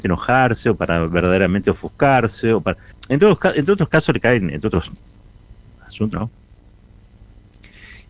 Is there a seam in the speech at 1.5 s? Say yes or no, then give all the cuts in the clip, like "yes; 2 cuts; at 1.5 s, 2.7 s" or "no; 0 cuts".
no; 2 cuts; at 2.9 s, 6.1 s